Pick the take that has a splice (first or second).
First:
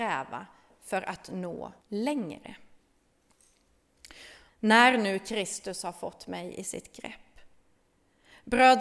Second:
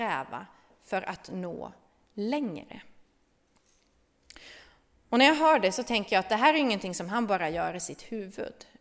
first